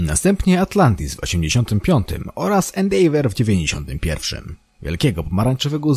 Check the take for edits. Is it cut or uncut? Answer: cut